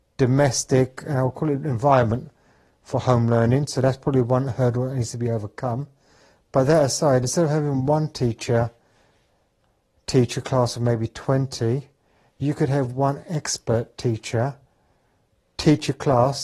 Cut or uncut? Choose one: uncut